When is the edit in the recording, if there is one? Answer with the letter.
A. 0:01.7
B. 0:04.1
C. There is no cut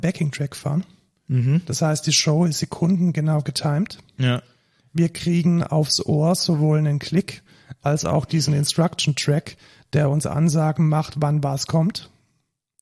C